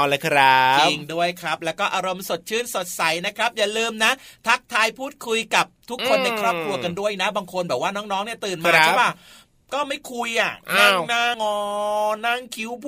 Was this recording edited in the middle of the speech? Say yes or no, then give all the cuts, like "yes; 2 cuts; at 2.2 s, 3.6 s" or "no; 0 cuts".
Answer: yes; 1 cut; at 11.3 s